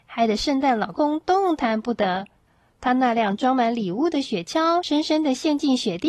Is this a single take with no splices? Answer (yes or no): no